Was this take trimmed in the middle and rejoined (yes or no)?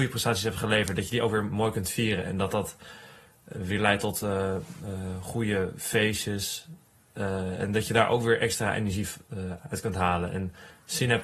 no